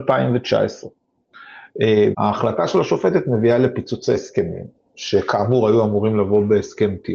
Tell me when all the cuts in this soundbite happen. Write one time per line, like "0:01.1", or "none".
0:02.1